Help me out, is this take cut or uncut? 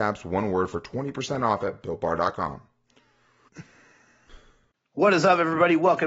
uncut